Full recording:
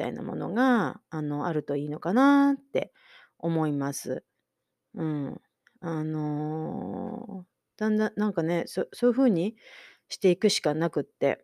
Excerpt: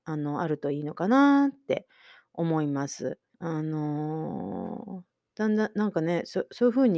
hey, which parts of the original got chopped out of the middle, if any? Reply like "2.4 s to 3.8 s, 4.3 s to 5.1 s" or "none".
4.4 s to 5.8 s